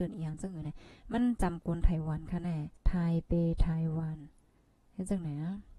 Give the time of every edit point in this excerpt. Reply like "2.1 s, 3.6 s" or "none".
2.8 s